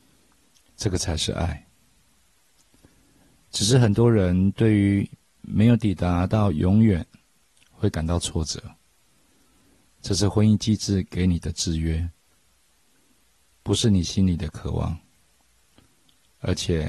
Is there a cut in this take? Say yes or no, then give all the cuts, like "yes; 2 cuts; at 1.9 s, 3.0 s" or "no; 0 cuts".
no; 0 cuts